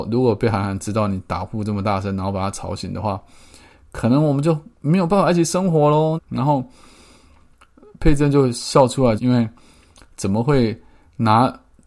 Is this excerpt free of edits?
no; 2 cuts; at 6.2 s, 9.2 s

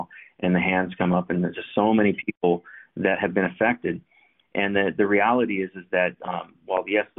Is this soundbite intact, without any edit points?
yes; 0 cuts

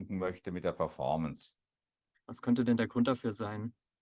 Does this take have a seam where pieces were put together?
yes; 1 cut; at 2.1 s

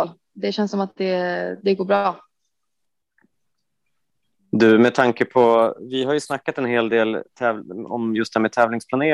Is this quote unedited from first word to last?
yes; 0 cuts

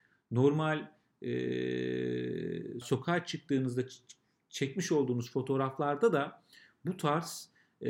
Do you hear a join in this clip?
yes; 1 cut; at 2.8 s

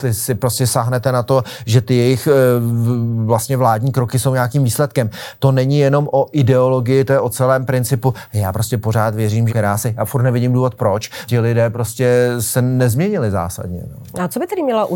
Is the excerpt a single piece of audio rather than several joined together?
no; 2 cuts; at 9.5 s, 11.3 s

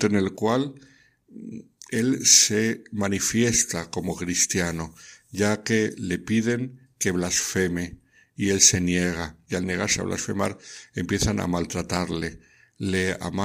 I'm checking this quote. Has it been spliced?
no; 0 cuts

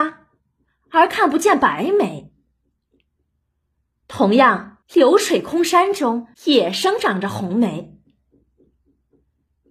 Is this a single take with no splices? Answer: no; 2 cuts; at 4.8 s, 6.3 s

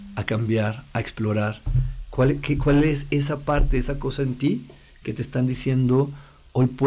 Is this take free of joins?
yes; 0 cuts

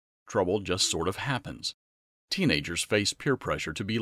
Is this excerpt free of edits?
yes; 0 cuts

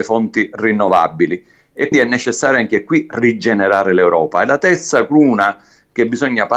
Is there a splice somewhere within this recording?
yes; 1 cut; at 1.9 s

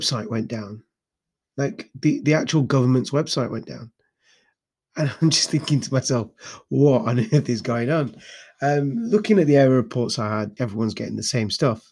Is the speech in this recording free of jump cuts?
no; 1 cut; at 10.6 s

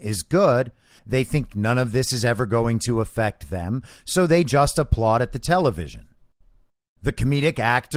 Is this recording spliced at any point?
yes; 1 cut; at 1.0 s

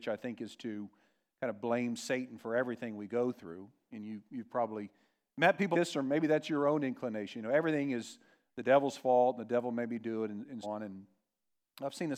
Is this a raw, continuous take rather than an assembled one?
no; 2 cuts; at 5.7 s, 10.6 s

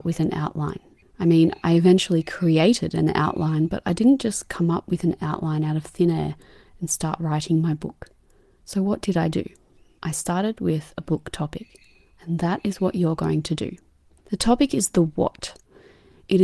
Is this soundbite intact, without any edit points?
yes; 0 cuts

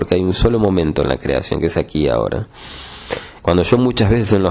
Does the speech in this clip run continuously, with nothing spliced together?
no; 1 cut; at 3.4 s

